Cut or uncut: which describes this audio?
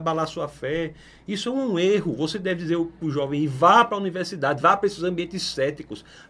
uncut